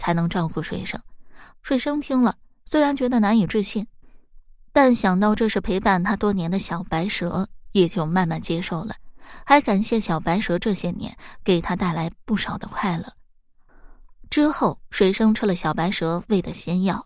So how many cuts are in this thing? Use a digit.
1